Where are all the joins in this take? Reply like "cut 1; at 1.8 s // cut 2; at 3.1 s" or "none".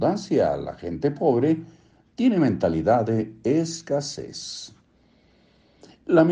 none

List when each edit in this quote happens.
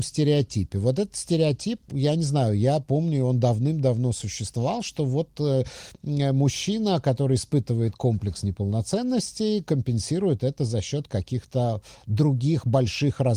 cut 1; at 1.9 s

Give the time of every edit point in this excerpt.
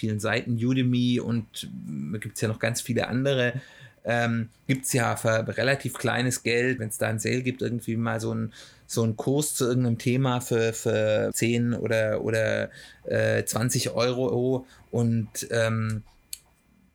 cut 1; at 6.8 s // cut 2; at 11.3 s

